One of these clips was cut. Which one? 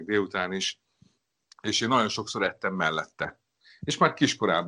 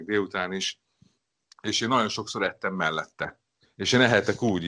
second; 1 cut; at 3.6 s

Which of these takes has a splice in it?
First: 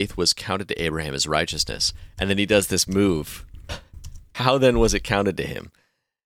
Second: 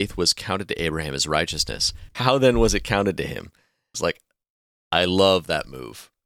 second; 2 cuts; at 2.1 s, 3.9 s

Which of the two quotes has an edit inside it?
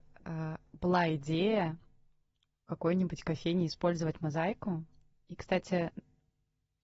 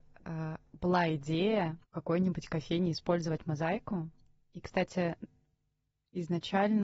second; 1 cut; at 1.8 s

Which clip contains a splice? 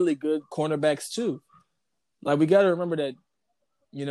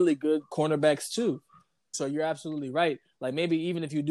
second; 1 cut; at 1.9 s

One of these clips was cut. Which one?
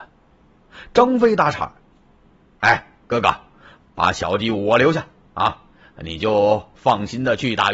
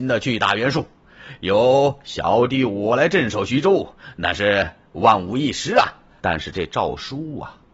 second; 1 cut; at 6.2 s

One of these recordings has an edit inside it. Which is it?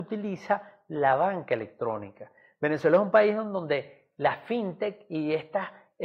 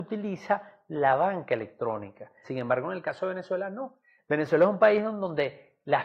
second; 2 cuts; at 2.4 s, 4.2 s

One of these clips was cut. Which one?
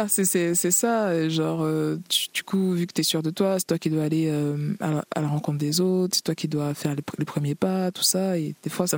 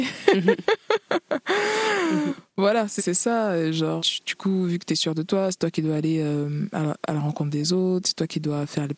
second; 2 cuts; at 3.0 s, 4.0 s

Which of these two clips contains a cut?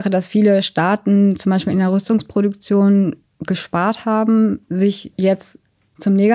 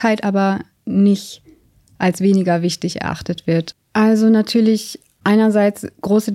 second; 1 cut; at 3.7 s

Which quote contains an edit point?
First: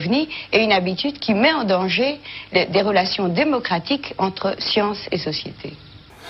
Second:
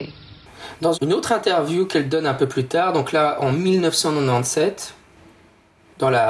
second; 1 cut; at 0.9 s

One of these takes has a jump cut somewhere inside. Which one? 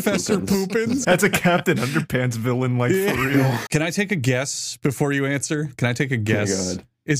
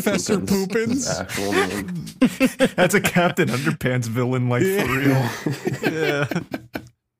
first; 2 cuts; at 1.0 s, 3.7 s

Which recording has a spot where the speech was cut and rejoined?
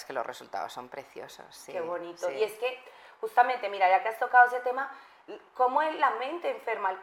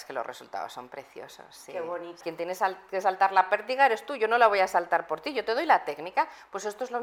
second; 1 cut; at 2.2 s

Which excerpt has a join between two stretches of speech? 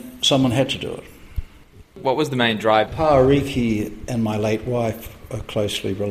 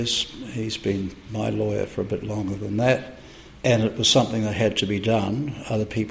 first; 2 cuts; at 1.8 s, 2.9 s

